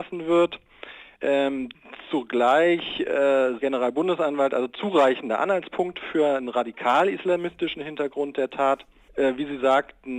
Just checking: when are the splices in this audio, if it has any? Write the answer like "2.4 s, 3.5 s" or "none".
3.6 s, 9.1 s